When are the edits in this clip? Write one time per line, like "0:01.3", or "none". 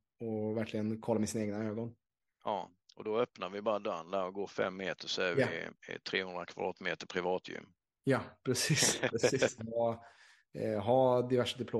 0:09.6